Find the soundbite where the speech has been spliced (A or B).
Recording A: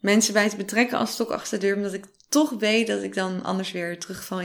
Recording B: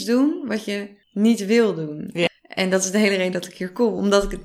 B